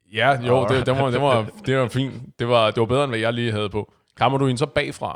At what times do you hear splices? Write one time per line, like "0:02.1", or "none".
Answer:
none

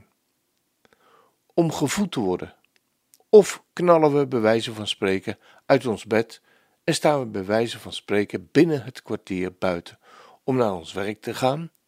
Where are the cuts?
0:03.2

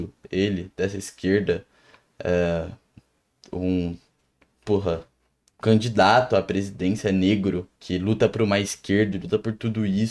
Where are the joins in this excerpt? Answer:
0:07.8
0:09.1

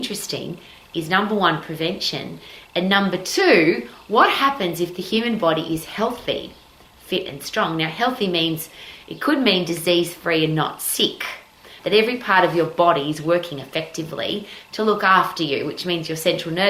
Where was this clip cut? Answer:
0:11.8

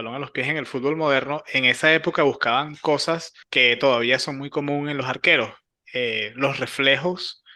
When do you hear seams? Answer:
0:03.4

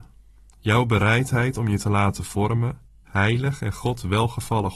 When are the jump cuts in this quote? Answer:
0:03.1

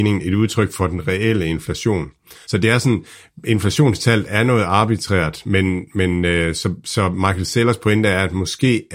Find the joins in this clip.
0:02.4

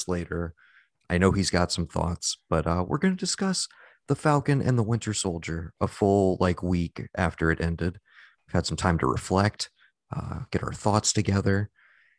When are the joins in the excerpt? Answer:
none

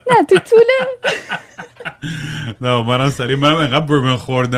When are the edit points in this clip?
none

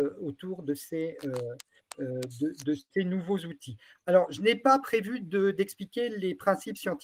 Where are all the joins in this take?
none

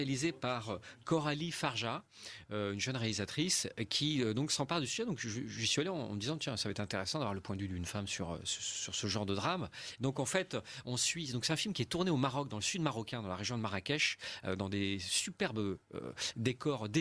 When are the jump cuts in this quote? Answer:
none

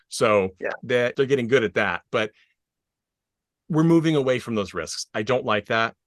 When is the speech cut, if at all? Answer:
0:01.1

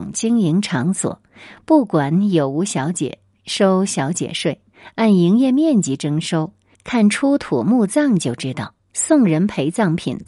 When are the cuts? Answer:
0:06.7
0:08.9

